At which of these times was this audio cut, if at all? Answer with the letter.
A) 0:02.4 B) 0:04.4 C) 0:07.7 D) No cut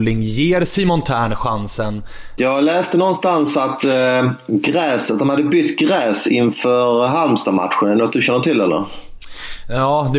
A